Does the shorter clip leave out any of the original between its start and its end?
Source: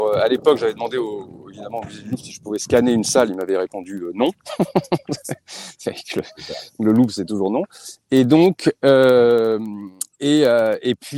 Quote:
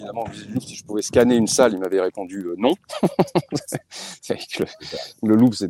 no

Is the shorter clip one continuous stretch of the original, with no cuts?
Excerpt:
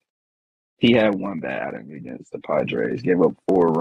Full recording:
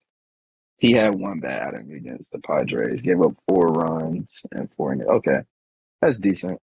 yes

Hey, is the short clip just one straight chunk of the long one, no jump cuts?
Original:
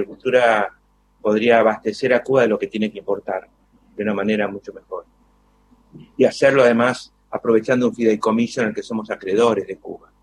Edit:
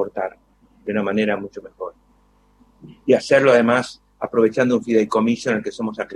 yes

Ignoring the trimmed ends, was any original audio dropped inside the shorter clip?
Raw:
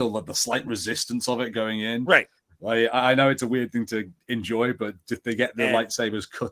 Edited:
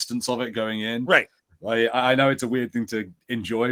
no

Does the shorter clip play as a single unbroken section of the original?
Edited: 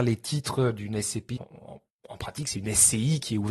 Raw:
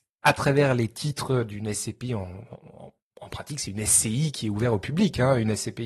no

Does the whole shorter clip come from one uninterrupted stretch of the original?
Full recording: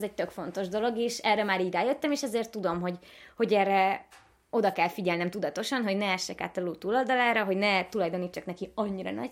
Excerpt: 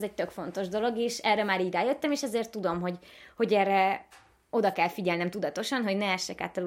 yes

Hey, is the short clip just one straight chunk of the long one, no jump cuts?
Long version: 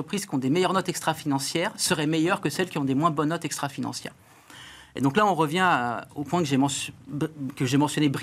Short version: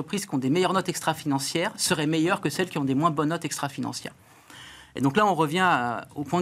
yes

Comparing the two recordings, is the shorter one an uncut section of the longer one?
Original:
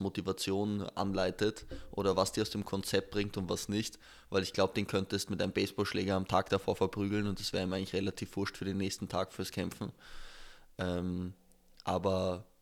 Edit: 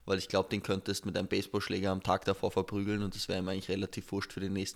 yes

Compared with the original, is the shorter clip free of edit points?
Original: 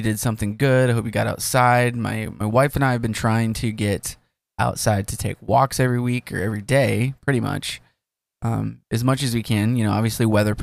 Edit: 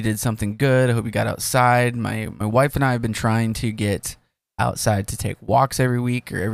yes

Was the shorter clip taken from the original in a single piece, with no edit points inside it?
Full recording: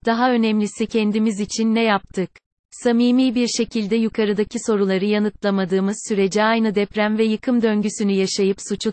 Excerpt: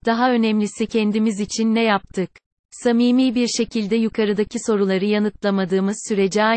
yes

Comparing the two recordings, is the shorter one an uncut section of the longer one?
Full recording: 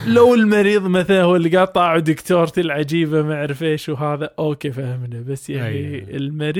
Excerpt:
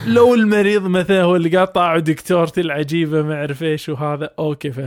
yes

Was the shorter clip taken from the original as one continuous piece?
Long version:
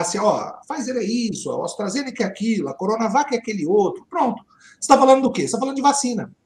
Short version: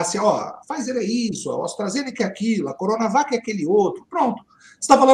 yes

